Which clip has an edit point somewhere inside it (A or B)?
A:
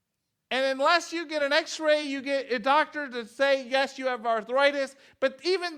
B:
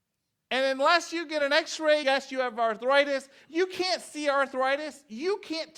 B